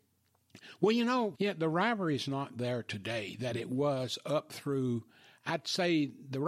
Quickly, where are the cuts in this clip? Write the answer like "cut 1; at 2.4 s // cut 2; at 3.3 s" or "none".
cut 1; at 1.3 s